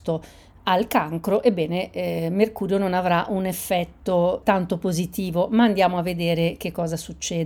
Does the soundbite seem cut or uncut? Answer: cut